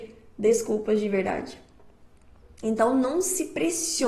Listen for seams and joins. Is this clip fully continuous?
yes; 0 cuts

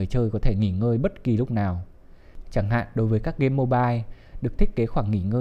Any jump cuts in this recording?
no; 0 cuts

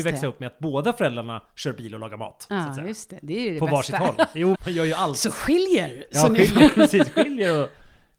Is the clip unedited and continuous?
no; 1 cut; at 4.5 s

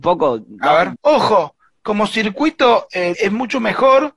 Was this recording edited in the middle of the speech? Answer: yes; 2 cuts; at 1.0 s, 3.1 s

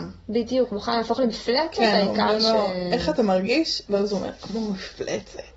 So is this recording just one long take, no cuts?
yes; 0 cuts

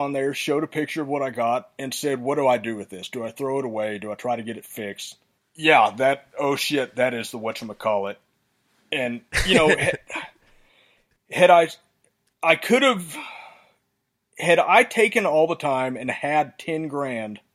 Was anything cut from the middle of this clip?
yes; 1 cut; at 5.4 s

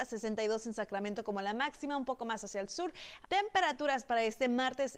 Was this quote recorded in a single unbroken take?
no; 1 cut; at 3.2 s

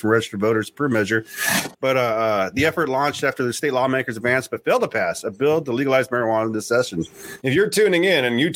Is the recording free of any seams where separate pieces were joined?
no; 2 cuts; at 1.7 s, 7.4 s

